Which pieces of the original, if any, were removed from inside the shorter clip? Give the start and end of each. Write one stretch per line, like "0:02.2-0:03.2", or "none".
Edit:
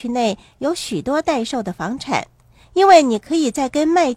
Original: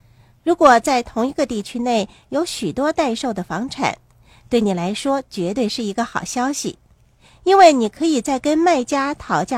0:04.3-0:07.3